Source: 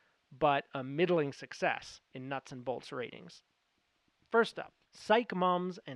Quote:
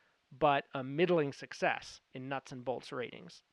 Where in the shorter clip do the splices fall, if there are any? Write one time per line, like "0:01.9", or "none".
none